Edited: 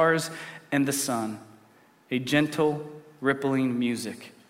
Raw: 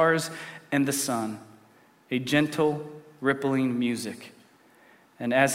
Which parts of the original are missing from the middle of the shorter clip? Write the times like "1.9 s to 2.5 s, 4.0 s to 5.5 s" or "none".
none